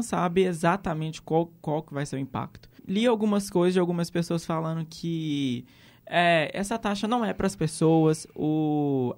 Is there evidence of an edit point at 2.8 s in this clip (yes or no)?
yes